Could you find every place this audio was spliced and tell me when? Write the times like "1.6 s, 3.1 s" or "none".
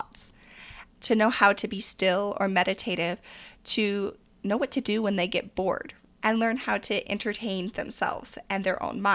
none